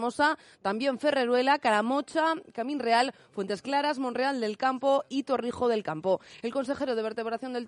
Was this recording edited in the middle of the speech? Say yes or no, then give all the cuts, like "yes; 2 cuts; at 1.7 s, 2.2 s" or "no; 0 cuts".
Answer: no; 0 cuts